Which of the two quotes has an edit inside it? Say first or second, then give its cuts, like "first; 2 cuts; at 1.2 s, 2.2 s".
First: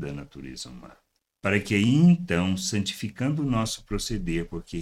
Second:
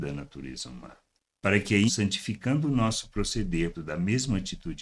second; 2 cuts; at 1.9 s, 3.7 s